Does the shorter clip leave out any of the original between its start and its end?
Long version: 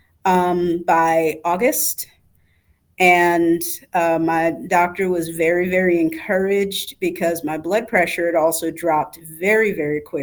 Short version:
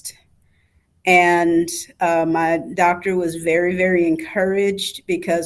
no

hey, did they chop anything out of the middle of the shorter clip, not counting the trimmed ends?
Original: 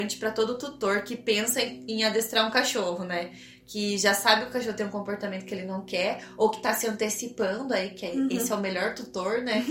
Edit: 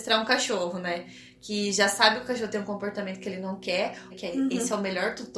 yes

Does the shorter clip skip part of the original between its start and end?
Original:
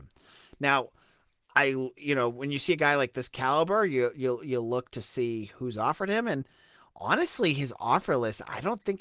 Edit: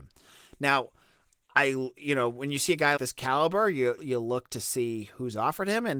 yes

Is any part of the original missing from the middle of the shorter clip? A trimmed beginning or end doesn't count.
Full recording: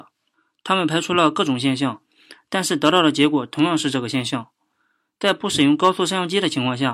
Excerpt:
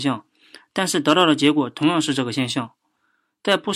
no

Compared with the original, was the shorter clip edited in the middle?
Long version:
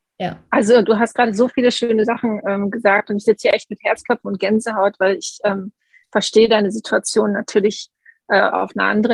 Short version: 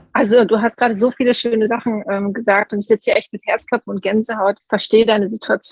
yes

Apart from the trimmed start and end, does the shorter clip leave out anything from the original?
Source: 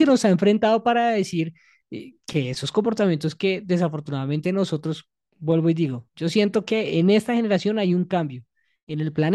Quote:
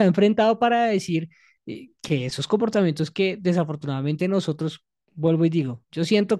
no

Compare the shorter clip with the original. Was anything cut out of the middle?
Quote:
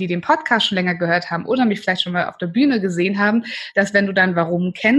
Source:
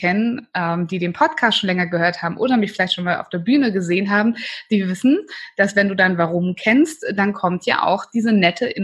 yes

